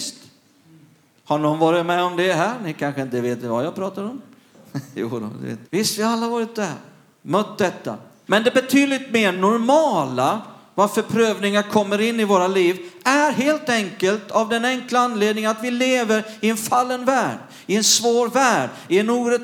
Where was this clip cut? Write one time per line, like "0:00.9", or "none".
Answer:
0:05.7
0:08.3